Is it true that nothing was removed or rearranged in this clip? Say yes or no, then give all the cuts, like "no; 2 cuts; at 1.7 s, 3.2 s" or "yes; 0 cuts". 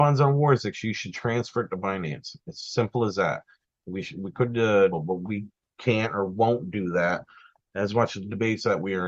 no; 1 cut; at 4.9 s